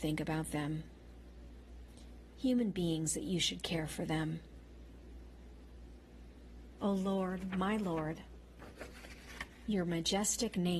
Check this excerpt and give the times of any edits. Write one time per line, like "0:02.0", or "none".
0:06.8